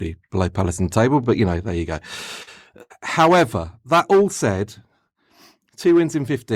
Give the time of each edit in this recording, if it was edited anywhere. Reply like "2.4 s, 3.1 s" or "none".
none